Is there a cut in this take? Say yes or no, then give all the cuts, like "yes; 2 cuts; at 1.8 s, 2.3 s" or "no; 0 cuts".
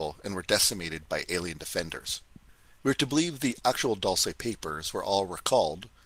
yes; 1 cut; at 2.8 s